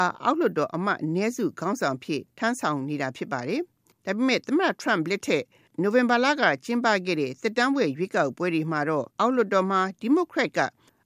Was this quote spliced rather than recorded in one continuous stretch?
yes; 1 cut; at 9.1 s

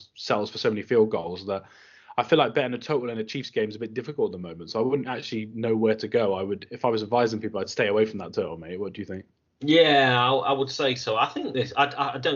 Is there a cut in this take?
no; 0 cuts

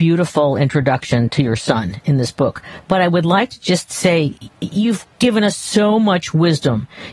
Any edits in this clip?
no; 0 cuts

